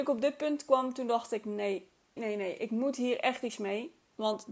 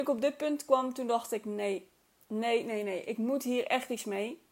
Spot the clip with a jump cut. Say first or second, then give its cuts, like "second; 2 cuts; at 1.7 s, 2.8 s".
first; 1 cut; at 2.2 s